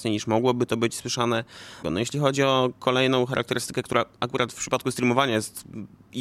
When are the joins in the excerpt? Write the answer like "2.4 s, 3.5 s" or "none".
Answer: 1.8 s

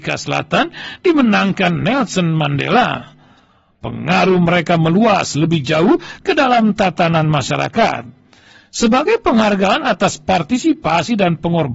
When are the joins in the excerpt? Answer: 3.7 s

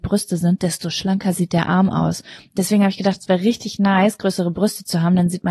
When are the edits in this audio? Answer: none

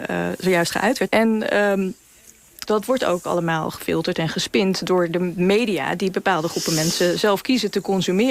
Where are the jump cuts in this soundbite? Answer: 1.1 s, 2.7 s

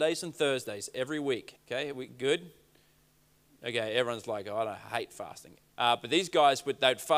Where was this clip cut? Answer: 1.6 s, 5.7 s

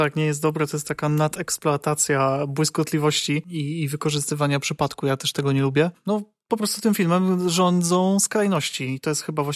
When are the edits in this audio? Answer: none

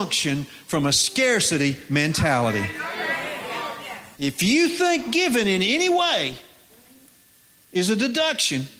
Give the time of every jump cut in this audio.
4.1 s

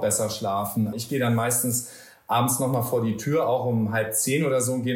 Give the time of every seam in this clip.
0.9 s

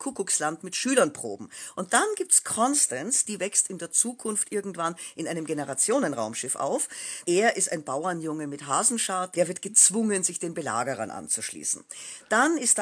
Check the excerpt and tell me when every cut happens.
7.2 s, 9.3 s

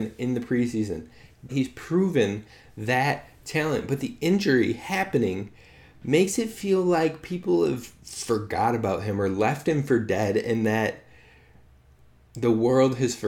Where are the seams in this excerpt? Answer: 1.5 s

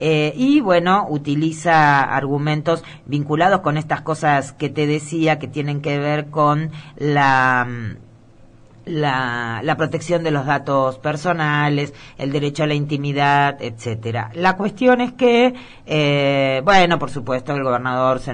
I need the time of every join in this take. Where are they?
none

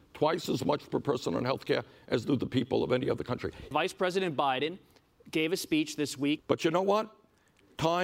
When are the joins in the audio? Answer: 3.7 s, 6.4 s

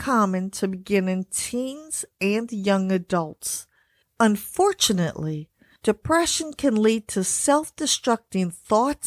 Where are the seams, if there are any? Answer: 4.0 s

